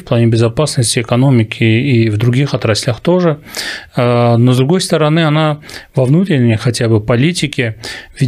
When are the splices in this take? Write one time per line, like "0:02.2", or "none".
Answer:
none